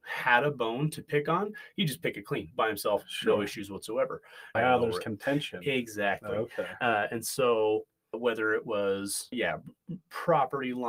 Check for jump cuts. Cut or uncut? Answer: cut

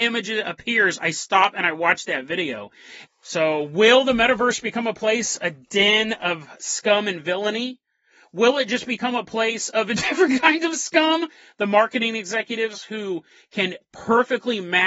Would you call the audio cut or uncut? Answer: cut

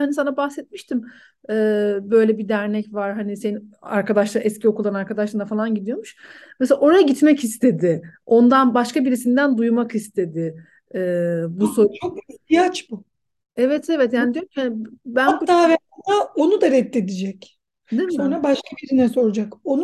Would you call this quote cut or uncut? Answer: uncut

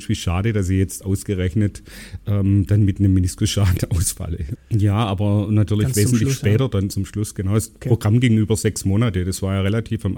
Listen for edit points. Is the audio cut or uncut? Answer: cut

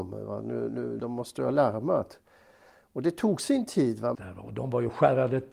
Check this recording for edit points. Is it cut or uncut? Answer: cut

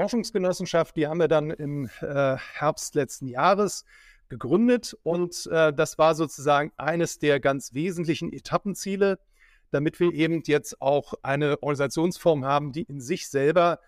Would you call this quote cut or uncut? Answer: uncut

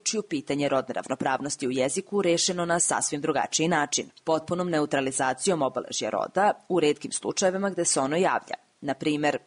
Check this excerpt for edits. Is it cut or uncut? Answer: uncut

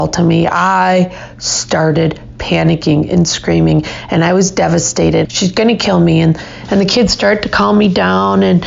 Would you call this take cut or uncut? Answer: cut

